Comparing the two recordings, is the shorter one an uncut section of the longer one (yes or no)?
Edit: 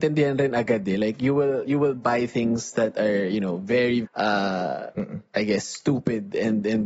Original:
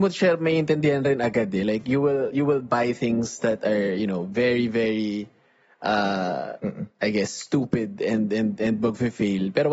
no